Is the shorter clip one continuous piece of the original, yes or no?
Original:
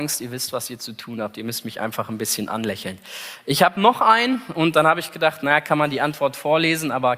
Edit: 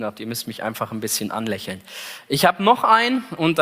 yes